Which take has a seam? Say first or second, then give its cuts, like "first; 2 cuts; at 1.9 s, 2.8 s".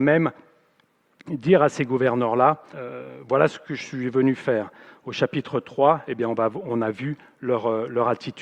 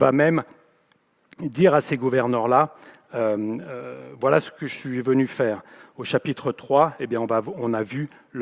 first; 1 cut; at 2.7 s